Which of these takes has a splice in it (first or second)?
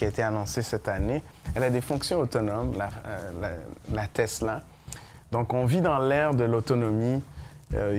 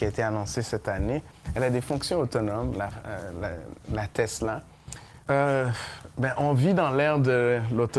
second